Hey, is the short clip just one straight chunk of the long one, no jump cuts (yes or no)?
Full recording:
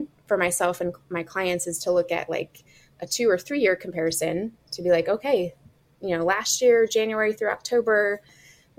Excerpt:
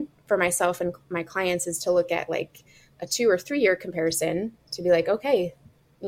yes